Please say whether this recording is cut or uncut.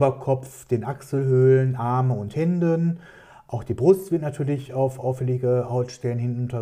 uncut